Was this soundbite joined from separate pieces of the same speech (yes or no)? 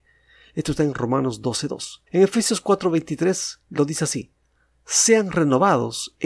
yes